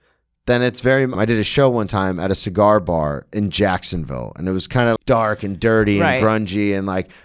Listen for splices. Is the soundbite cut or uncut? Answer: cut